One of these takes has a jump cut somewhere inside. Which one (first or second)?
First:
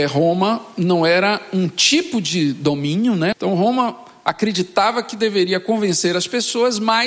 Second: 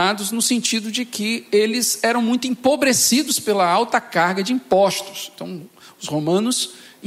first